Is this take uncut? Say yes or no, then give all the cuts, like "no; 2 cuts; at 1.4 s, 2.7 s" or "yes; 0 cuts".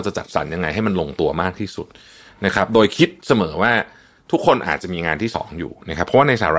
yes; 0 cuts